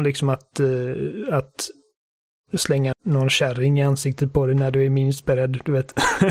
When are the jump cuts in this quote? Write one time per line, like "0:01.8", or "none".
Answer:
0:02.9